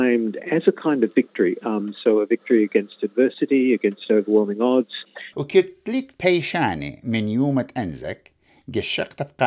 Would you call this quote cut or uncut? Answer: cut